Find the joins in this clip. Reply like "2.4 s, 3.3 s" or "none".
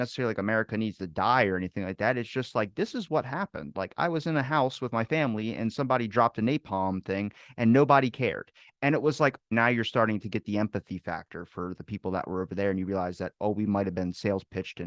9.5 s